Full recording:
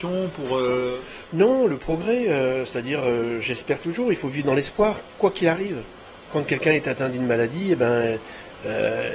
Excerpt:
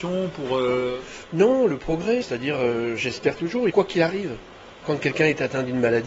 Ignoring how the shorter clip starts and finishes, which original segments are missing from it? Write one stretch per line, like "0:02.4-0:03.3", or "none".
0:02.2-0:02.6
0:04.1-0:05.2